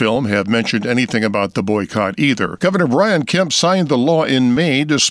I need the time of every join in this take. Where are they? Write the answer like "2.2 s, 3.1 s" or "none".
2.6 s